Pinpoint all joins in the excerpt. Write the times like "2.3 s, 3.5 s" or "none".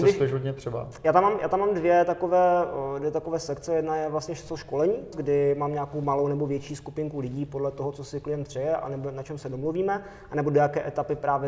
5.1 s